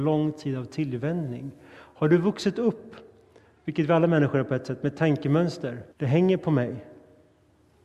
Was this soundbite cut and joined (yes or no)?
yes